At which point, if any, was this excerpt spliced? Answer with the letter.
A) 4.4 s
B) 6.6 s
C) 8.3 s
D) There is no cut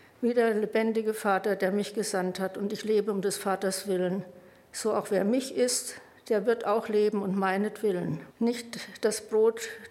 C